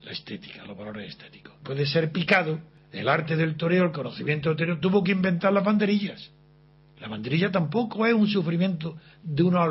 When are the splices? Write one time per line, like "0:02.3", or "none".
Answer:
none